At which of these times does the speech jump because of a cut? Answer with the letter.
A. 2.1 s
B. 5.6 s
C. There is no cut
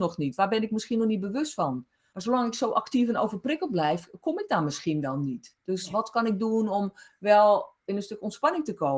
A